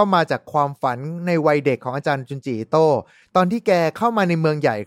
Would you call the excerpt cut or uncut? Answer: uncut